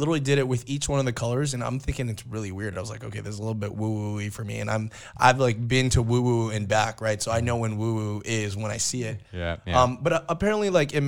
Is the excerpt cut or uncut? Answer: uncut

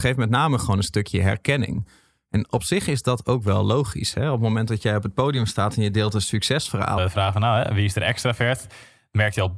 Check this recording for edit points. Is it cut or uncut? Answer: cut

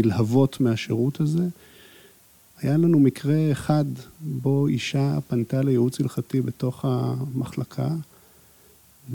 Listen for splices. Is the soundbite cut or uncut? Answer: uncut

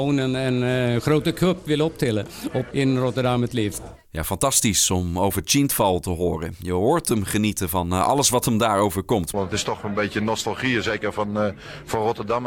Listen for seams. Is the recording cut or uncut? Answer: cut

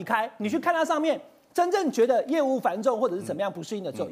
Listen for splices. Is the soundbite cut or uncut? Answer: uncut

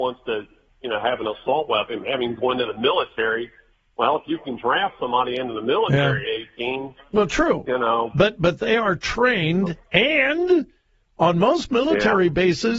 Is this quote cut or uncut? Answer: uncut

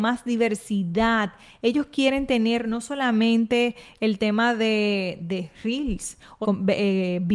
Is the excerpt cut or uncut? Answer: cut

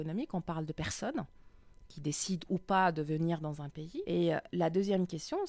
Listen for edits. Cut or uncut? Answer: cut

